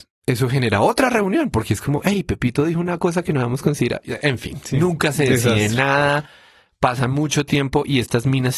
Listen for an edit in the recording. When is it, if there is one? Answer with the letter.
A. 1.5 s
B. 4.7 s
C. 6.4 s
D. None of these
D